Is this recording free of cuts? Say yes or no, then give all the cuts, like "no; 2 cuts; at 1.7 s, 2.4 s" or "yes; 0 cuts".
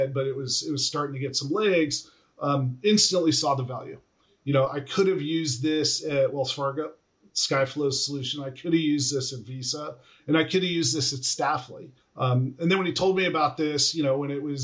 no; 1 cut; at 12.0 s